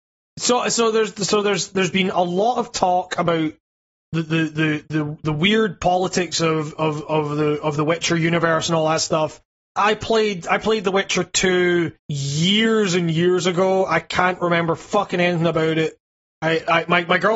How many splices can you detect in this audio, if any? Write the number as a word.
two